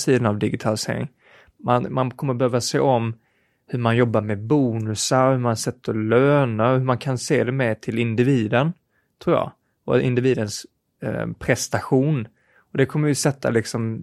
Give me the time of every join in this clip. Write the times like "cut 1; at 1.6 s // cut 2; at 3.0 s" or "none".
none